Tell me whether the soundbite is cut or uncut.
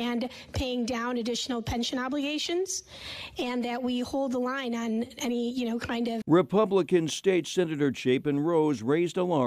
cut